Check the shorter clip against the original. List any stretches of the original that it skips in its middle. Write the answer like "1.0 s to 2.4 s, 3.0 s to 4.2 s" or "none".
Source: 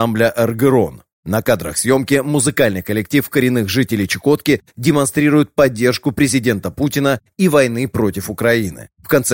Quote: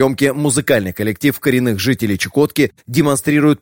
none